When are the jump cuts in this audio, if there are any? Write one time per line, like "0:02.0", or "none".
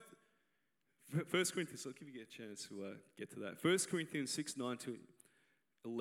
none